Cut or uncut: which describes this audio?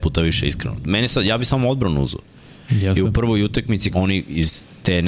cut